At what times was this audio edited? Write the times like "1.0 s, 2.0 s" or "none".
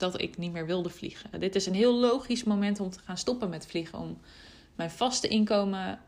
1.3 s